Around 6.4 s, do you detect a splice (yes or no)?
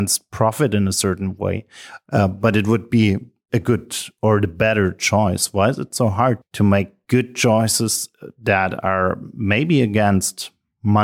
yes